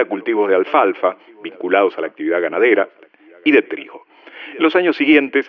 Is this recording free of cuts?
yes; 0 cuts

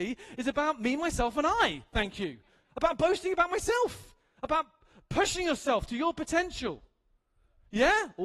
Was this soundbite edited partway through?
no; 0 cuts

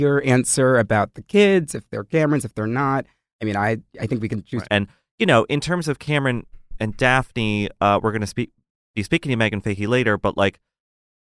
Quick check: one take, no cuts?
no; 1 cut; at 4.7 s

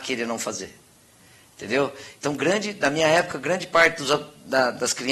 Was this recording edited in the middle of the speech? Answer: no; 0 cuts

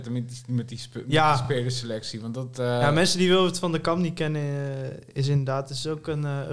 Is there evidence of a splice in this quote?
no; 0 cuts

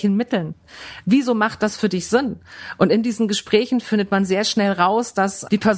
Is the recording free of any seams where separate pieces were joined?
yes; 0 cuts

